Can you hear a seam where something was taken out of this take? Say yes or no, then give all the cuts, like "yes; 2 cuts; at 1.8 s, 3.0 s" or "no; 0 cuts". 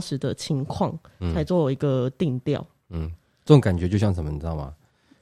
no; 0 cuts